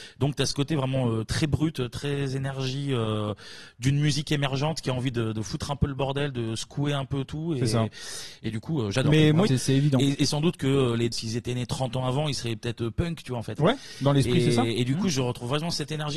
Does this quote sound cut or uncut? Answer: cut